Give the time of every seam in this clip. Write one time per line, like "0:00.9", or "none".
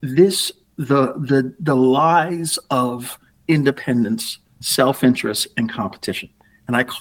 0:04.6

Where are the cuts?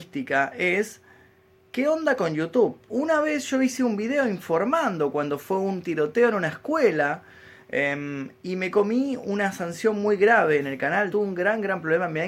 0:02.9
0:11.1

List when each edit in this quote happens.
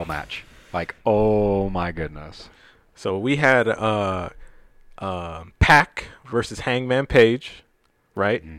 none

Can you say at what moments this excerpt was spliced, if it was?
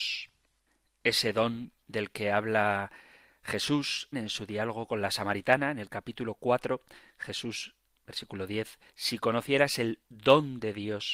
0:04.1
0:08.9

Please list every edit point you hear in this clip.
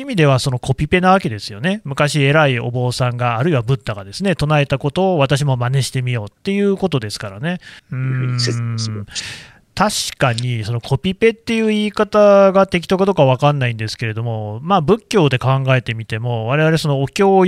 0:07.8

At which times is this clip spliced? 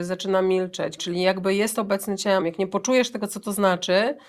0:01.0
0:02.4

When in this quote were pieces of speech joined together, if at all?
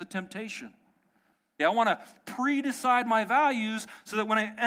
0:01.6

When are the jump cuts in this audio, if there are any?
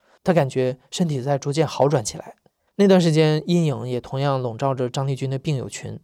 0:02.7

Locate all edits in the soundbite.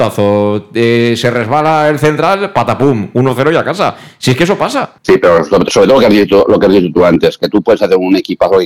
0:05.0

